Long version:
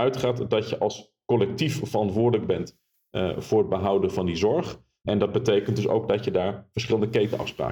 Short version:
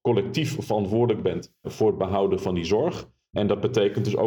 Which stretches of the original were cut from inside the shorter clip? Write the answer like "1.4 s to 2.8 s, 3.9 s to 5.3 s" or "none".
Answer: 2.9 s to 3.4 s